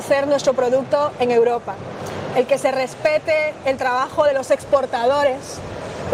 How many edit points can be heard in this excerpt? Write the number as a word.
two